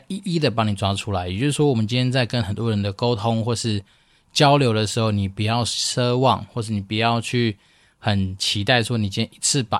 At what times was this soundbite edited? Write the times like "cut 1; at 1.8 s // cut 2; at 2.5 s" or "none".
none